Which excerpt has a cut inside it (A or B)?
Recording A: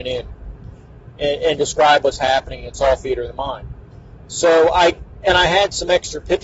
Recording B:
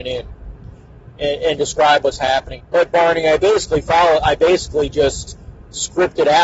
B